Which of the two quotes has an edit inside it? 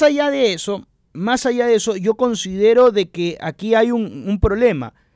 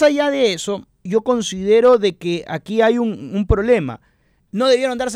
second; 1 cut; at 1.1 s

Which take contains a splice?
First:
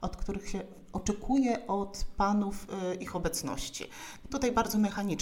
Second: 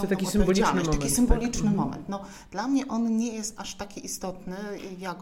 first; 1 cut; at 4.2 s

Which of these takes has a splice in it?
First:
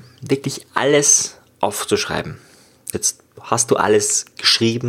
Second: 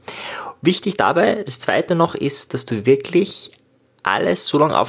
first; 1 cut; at 2.9 s

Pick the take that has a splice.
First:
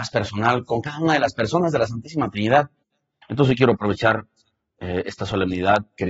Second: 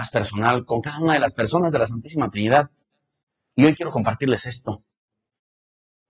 first; 1 cut; at 3.2 s

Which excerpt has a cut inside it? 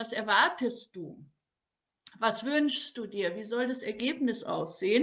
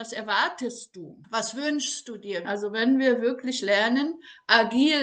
second; 2 cuts; at 1.2 s, 2.4 s

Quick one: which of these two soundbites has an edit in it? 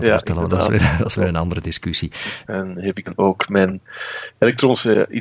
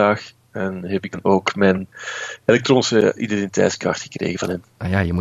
first; 1 cut; at 2.5 s

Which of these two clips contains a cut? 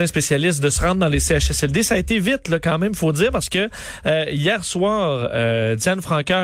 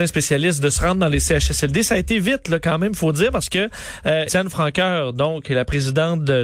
second; 1 cut; at 4.3 s

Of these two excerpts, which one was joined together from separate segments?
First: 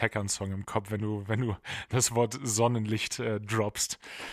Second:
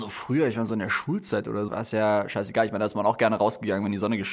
second; 1 cut; at 1.7 s

